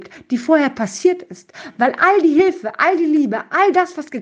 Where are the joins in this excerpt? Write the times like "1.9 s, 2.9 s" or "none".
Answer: none